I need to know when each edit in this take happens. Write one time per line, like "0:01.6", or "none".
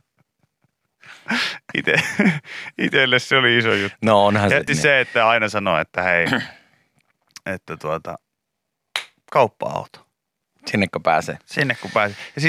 0:04.7